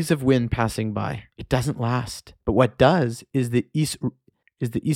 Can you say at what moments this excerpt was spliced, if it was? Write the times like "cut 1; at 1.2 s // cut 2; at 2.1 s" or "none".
cut 1; at 1.3 s // cut 2; at 2.4 s